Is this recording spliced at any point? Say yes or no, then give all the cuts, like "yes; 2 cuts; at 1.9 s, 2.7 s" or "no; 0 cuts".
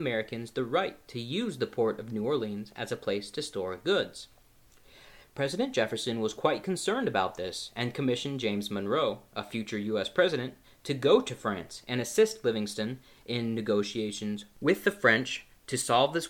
no; 0 cuts